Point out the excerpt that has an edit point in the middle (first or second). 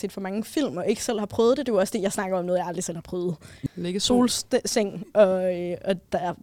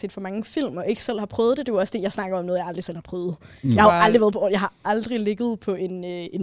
first